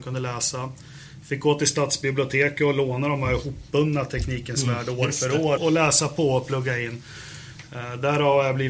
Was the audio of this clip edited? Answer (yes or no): yes